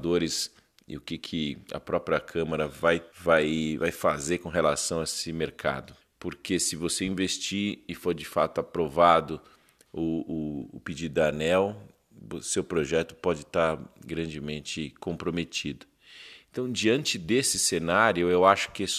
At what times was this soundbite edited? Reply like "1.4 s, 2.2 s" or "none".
3.1 s, 6.0 s